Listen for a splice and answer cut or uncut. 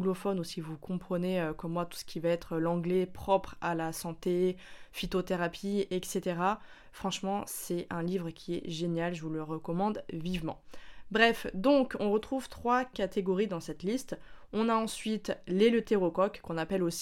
cut